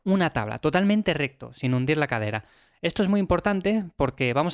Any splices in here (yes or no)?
no